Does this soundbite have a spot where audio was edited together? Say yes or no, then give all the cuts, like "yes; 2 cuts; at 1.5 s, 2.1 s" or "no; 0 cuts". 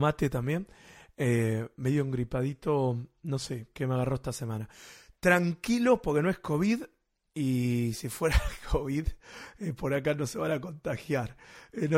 no; 0 cuts